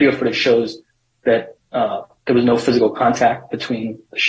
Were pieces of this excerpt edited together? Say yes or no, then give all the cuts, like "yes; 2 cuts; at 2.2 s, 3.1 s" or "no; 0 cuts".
no; 0 cuts